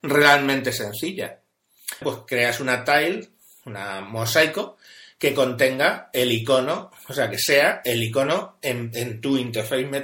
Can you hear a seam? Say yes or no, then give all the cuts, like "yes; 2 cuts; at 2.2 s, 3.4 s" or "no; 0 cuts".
yes; 1 cut; at 2.0 s